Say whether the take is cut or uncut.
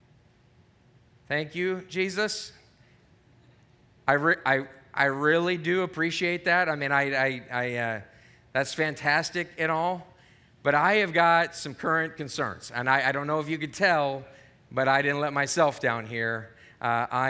uncut